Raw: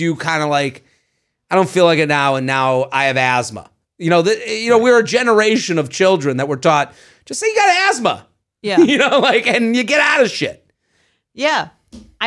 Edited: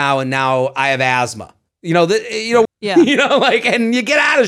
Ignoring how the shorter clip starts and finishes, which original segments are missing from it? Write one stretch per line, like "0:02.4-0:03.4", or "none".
0:04.8-0:08.5